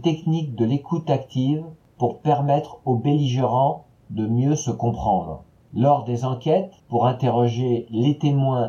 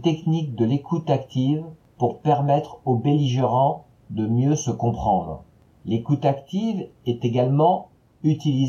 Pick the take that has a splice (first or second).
first